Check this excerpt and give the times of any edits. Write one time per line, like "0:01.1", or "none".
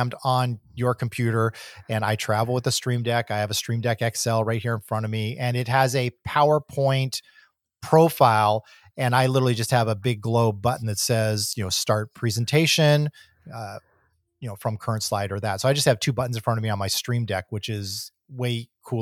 none